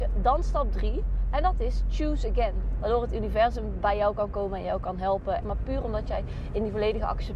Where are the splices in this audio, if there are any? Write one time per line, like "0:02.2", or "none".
0:02.8
0:05.4